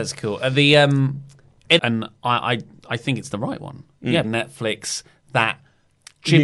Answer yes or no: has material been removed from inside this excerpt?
yes